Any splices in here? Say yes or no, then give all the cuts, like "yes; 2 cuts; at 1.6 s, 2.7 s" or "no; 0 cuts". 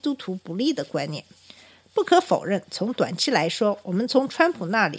no; 0 cuts